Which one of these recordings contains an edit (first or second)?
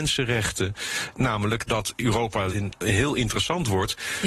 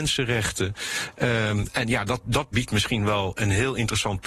first